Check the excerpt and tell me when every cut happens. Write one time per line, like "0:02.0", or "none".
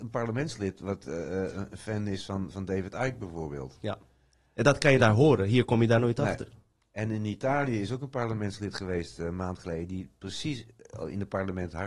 none